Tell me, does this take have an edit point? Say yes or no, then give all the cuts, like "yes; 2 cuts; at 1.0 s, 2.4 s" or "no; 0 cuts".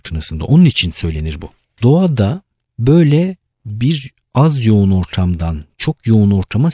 yes; 1 cut; at 1.8 s